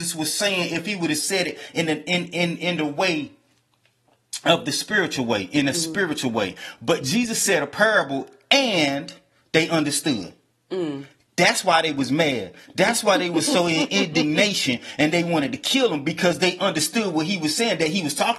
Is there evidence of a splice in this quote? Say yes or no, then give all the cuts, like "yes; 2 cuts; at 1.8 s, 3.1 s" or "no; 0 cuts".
no; 0 cuts